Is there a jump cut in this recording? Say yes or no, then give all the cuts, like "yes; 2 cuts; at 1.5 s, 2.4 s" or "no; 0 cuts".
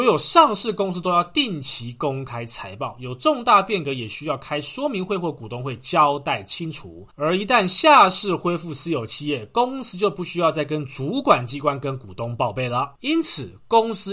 yes; 1 cut; at 7.1 s